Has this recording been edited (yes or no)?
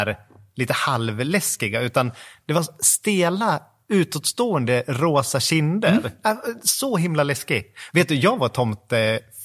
no